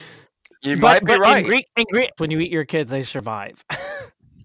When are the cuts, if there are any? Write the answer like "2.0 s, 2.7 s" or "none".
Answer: 2.2 s